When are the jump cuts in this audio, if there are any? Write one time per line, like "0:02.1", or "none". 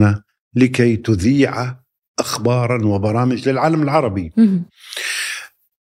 none